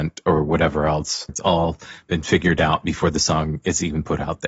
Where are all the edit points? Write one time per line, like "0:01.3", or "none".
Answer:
0:01.3